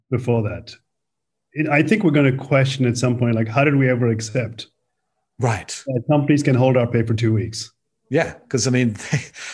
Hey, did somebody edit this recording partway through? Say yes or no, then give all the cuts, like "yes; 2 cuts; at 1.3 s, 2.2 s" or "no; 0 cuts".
no; 0 cuts